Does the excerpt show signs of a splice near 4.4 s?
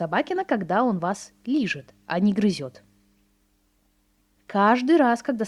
yes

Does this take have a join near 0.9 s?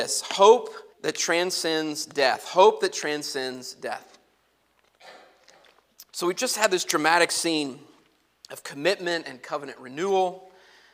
yes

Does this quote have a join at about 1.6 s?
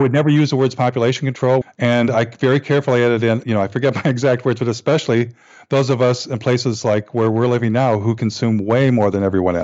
yes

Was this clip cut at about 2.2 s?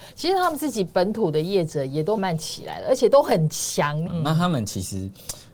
yes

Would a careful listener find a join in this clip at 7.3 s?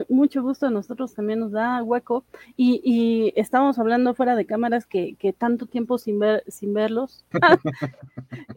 yes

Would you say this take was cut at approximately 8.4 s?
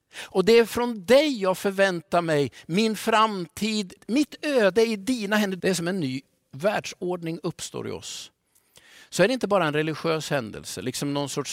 no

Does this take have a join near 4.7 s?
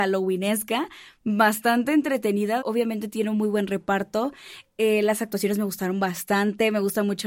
no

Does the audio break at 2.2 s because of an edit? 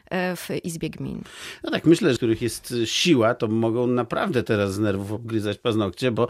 yes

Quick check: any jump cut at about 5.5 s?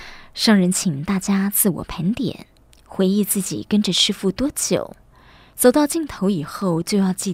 yes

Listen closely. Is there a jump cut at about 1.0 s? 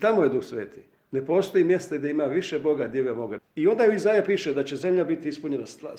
no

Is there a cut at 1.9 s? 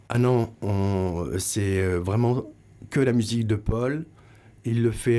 no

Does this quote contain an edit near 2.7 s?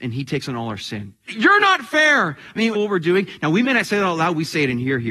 yes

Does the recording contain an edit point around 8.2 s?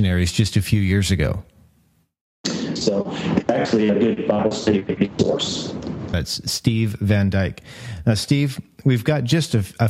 no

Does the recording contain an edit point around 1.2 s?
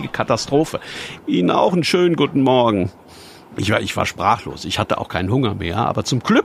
yes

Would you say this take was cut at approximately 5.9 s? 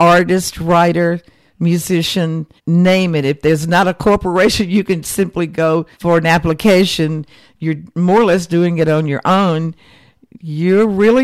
yes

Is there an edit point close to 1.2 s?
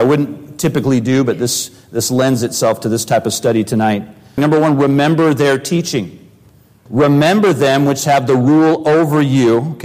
no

